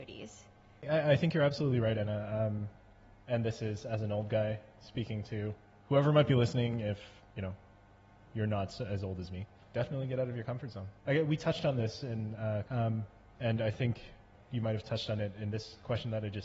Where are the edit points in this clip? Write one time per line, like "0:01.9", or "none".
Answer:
0:03.2
0:11.0
0:12.6